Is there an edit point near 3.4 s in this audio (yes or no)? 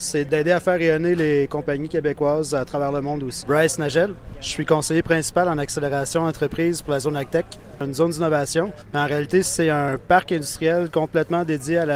yes